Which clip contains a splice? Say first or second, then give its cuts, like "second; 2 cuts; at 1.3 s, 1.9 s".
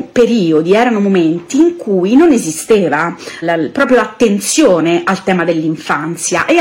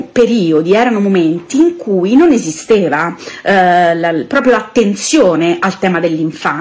first; 1 cut; at 3.4 s